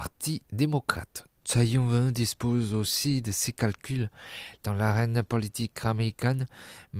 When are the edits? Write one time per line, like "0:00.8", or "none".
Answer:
0:01.4
0:04.6